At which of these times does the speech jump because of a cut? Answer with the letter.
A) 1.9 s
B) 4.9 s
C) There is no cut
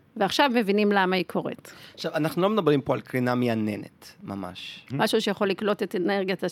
B